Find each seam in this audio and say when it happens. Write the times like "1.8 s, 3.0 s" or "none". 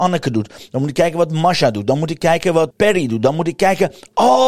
2.7 s